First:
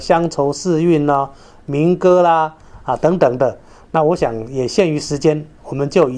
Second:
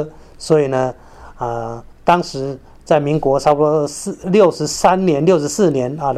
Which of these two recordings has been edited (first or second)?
second